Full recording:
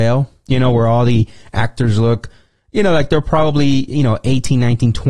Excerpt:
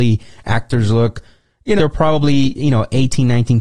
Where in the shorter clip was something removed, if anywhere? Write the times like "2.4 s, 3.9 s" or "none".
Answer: 1.8 s